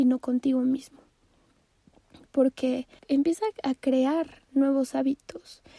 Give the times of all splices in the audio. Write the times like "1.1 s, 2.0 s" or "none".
3.0 s

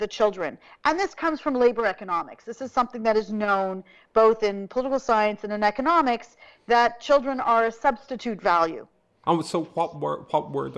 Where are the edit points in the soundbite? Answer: 9.2 s

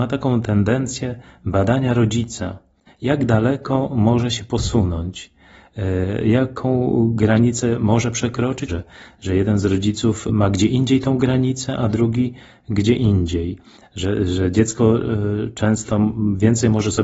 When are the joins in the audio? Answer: 8.7 s

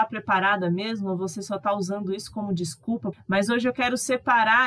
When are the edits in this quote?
3.1 s

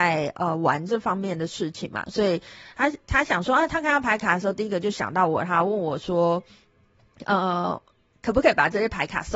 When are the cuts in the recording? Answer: none

